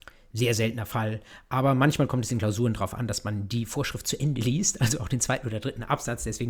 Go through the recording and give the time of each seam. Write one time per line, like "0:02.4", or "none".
none